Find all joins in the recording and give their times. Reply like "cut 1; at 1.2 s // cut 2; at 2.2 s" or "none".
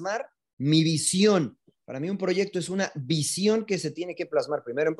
none